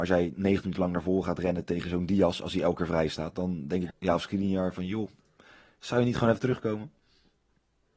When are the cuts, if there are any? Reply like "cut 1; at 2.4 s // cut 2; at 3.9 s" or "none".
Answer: cut 1; at 3.9 s